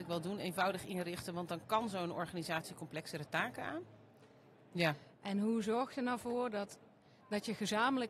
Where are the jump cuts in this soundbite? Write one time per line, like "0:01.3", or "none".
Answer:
0:04.7